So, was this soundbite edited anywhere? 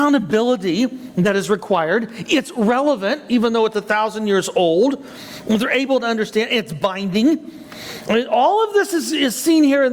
no; 0 cuts

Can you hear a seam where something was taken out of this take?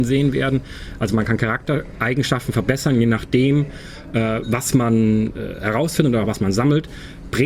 no; 0 cuts

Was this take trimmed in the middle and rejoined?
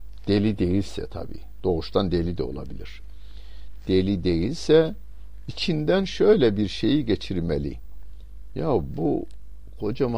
no; 0 cuts

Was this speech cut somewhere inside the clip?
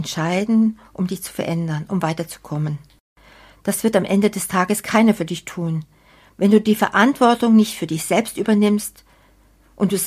no; 0 cuts

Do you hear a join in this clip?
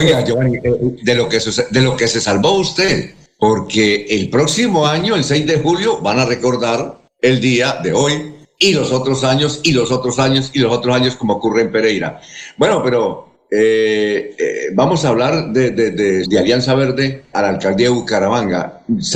yes; 2 cuts; at 16.2 s, 17.3 s

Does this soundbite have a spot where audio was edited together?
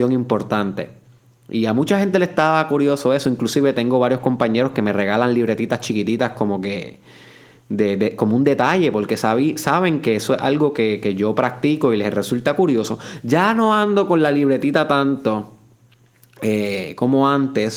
no; 0 cuts

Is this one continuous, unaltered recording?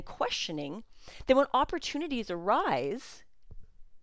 yes; 0 cuts

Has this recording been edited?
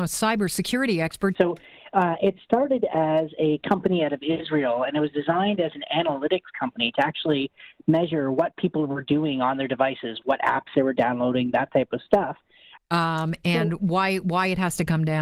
yes; 3 cuts; at 1.3 s, 10.2 s, 12.8 s

